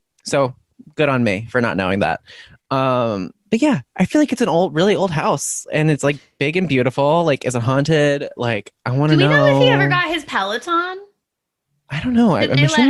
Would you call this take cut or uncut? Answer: uncut